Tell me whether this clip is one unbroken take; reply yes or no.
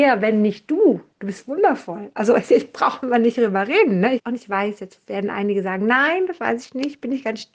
no